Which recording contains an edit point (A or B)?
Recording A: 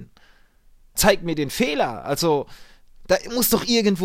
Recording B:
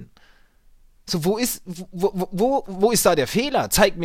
A